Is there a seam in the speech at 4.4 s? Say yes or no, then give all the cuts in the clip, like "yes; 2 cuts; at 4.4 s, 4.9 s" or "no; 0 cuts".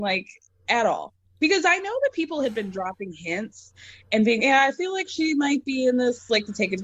yes; 1 cut; at 4.4 s